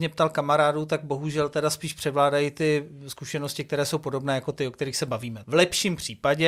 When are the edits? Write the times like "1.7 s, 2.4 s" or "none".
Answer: 5.4 s